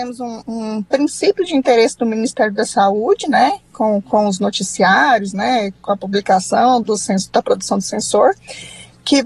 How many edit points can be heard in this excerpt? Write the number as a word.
one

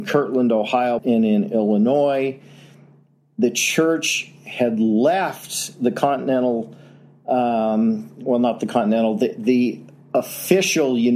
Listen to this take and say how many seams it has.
one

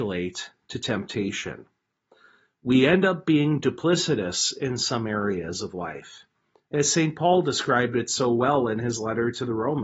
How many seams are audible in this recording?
zero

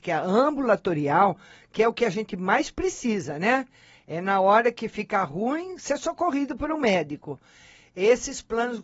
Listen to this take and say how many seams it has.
zero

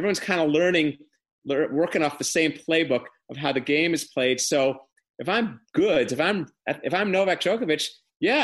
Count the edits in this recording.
zero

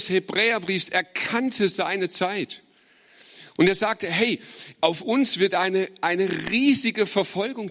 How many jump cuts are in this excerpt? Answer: zero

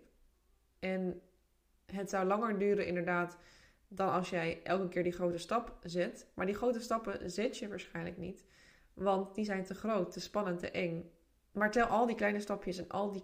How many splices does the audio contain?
one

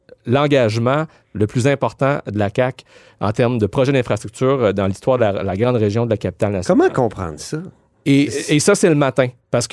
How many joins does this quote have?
zero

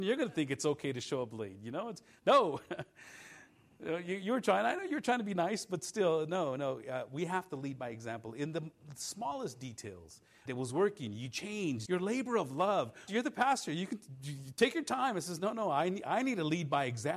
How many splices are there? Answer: three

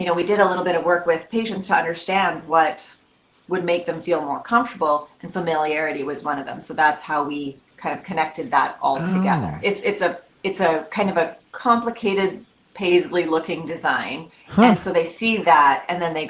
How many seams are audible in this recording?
one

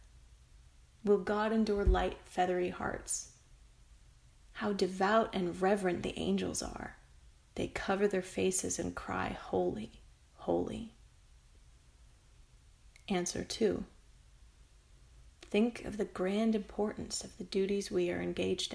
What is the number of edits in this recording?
zero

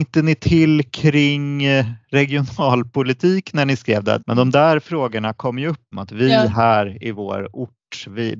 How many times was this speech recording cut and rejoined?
two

